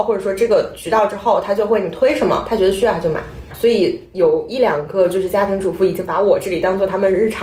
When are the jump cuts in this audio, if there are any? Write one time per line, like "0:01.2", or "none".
0:03.5